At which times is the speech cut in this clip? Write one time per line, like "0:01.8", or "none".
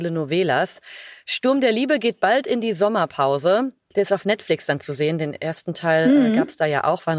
0:03.9